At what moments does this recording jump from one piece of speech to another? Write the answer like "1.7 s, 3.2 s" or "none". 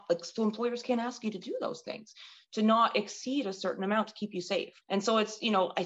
4.8 s